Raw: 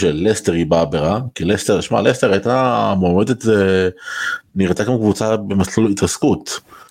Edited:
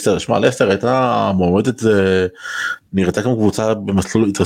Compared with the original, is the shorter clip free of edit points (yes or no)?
yes